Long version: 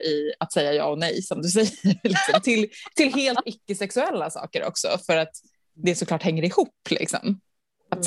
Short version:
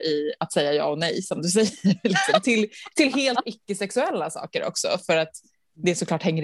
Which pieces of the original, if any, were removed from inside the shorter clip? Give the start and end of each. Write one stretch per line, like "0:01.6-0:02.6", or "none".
none